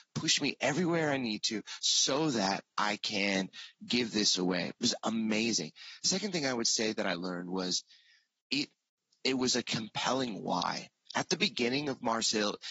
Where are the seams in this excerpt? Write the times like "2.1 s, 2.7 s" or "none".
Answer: none